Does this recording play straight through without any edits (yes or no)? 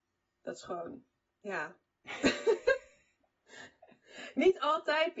yes